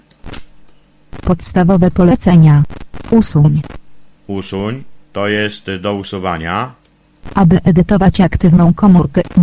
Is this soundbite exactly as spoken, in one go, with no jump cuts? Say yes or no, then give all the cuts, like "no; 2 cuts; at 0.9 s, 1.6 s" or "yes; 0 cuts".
no; 2 cuts; at 3.1 s, 7.3 s